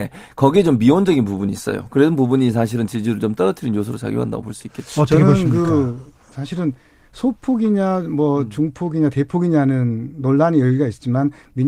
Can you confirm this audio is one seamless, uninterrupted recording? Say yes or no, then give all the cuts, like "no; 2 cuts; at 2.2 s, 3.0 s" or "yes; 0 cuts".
yes; 0 cuts